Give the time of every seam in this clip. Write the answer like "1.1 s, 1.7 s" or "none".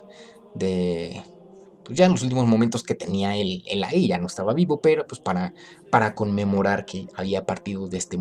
none